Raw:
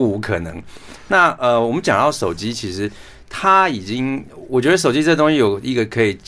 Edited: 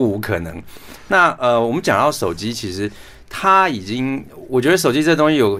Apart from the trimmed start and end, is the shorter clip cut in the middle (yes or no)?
no